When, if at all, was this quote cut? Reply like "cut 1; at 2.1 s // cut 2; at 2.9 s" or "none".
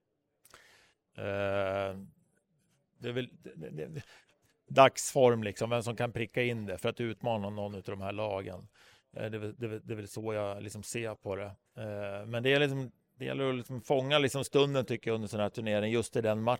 cut 1; at 1.1 s